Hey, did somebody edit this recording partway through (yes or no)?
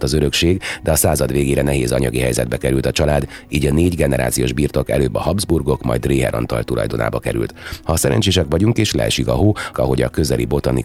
yes